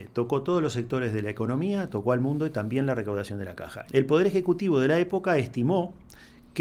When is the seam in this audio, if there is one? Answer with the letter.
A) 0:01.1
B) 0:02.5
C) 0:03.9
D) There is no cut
C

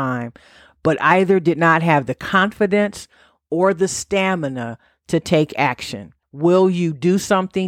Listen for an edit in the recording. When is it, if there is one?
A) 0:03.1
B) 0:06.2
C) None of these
B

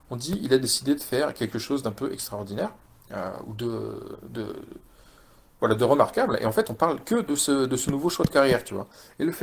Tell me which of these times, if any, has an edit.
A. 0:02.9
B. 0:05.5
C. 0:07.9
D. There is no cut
D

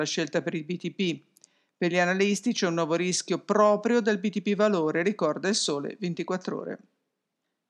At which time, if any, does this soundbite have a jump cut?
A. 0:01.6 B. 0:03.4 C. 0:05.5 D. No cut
D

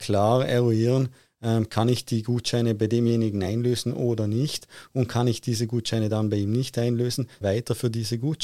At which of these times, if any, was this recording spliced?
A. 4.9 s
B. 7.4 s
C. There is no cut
B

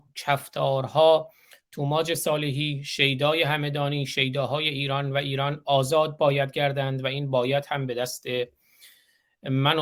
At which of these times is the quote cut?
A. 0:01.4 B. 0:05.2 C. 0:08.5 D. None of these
D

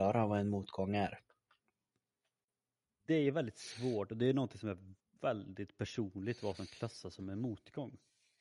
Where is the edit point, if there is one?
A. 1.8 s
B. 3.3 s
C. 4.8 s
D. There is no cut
D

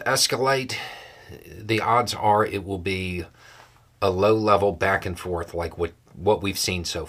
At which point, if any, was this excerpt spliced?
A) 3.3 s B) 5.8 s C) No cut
C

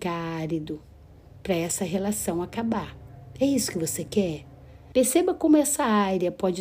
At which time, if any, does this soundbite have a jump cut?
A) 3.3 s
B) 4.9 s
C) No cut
B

